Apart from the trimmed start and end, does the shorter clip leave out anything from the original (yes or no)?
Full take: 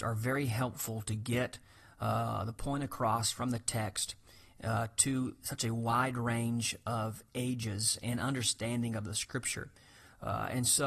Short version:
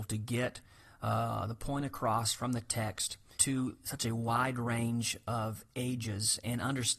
yes